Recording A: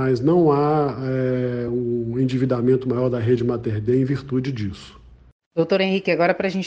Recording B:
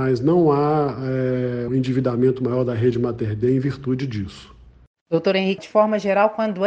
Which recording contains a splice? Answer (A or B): B